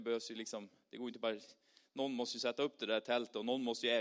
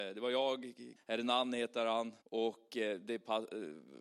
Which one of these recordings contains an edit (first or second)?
second